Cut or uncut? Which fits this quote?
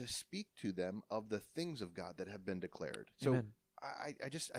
cut